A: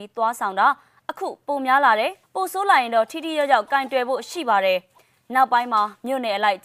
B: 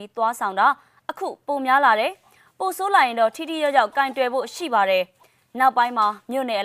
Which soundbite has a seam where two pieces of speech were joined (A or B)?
A